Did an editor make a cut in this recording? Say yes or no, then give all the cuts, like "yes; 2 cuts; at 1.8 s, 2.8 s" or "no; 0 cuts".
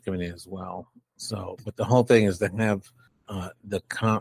no; 0 cuts